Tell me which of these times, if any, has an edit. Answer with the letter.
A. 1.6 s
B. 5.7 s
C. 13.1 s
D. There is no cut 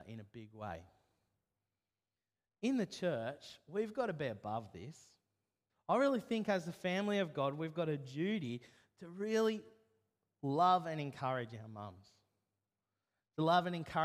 B